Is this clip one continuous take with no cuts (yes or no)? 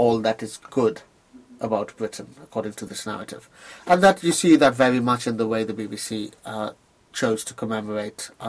yes